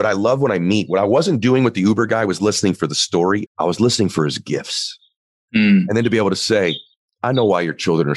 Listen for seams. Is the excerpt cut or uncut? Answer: cut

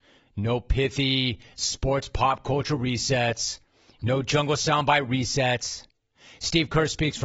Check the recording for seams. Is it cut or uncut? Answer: cut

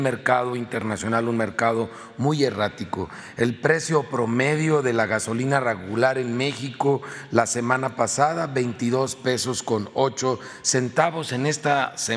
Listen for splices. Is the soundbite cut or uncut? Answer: uncut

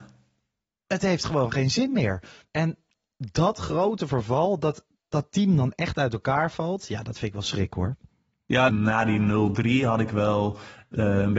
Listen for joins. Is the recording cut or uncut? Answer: cut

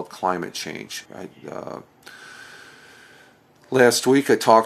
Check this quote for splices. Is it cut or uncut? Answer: cut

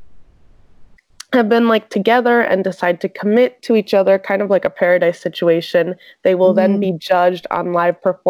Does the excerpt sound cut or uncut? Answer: uncut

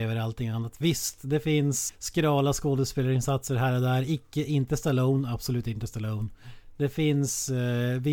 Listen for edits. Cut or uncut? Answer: cut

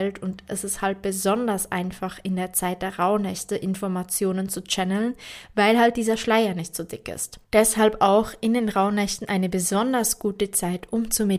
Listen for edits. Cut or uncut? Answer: uncut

